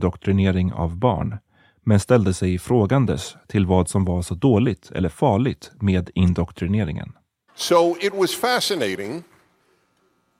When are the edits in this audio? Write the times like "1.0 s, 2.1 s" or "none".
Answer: 7.5 s